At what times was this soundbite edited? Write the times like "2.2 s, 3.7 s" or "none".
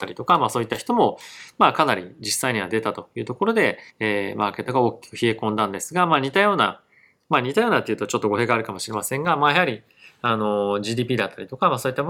3.9 s